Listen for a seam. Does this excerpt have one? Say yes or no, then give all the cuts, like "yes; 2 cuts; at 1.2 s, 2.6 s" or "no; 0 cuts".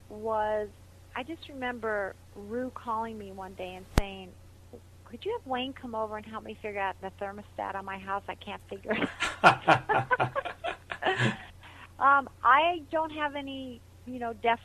no; 0 cuts